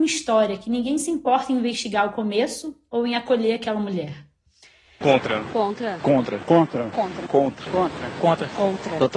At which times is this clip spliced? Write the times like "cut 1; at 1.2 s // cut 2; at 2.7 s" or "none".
cut 1; at 5.0 s